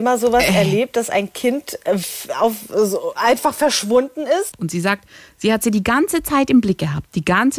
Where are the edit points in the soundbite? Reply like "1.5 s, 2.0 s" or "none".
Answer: 4.5 s